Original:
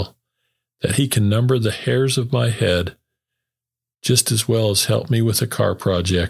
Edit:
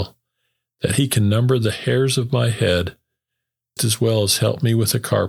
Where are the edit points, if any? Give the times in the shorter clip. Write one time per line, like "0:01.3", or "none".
0:03.8